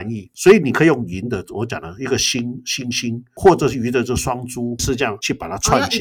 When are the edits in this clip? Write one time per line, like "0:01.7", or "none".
0:04.8